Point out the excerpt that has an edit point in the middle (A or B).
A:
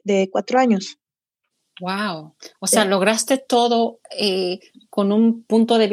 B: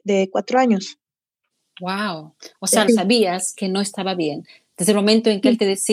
B